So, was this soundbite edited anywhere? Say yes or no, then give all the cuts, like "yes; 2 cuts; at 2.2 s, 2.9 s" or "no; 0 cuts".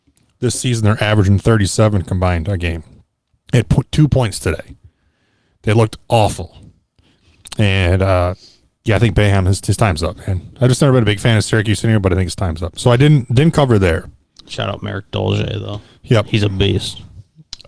no; 0 cuts